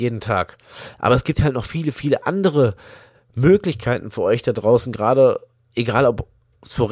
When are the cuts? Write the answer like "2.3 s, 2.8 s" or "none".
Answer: none